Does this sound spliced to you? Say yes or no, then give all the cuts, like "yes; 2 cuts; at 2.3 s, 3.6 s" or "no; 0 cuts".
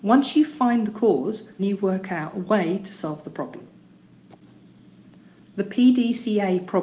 yes; 1 cut; at 1.6 s